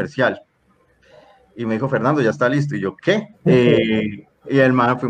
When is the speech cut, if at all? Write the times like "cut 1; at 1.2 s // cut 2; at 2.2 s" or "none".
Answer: cut 1; at 3.3 s